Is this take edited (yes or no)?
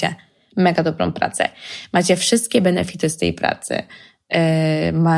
no